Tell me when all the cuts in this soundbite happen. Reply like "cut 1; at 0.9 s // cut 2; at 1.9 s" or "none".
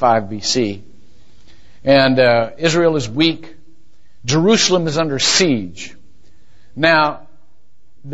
none

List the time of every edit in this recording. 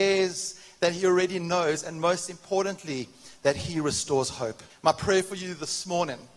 cut 1; at 4.7 s

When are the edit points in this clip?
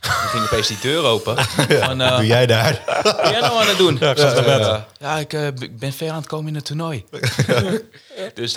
none

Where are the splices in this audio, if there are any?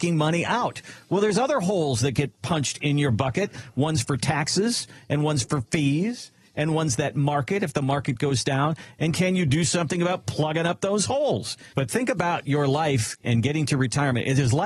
cut 1; at 8.9 s // cut 2; at 11.7 s

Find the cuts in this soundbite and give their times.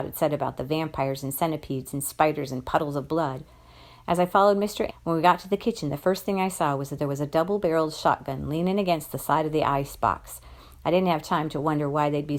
cut 1; at 4.9 s

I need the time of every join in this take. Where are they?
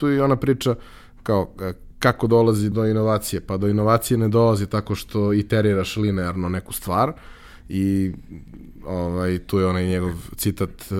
cut 1; at 2.7 s

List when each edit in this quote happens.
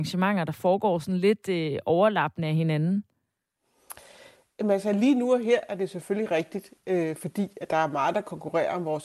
none

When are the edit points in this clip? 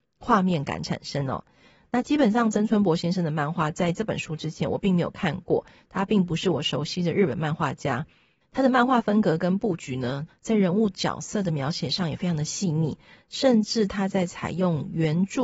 cut 1; at 8.4 s // cut 2; at 10.3 s

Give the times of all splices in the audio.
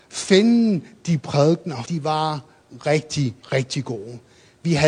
cut 1; at 1.8 s // cut 2; at 3.4 s

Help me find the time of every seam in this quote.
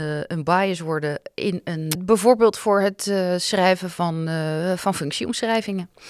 cut 1; at 1.9 s

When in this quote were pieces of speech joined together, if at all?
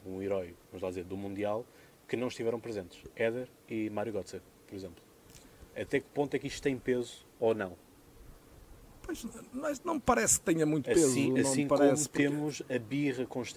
none

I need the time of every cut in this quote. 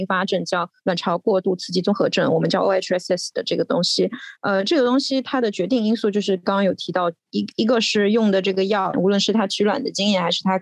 cut 1; at 4.4 s // cut 2; at 8.9 s

